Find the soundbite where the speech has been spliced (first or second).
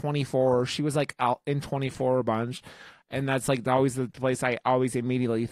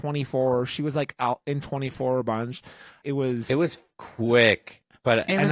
second